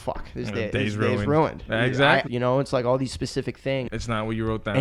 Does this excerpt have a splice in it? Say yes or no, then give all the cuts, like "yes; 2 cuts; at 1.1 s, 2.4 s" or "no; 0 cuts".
yes; 2 cuts; at 2.3 s, 3.9 s